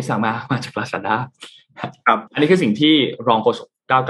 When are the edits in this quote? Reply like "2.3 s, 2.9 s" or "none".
2.3 s